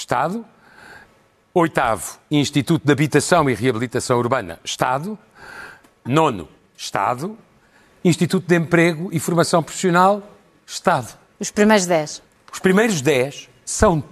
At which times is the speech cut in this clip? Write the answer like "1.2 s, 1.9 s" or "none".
6.1 s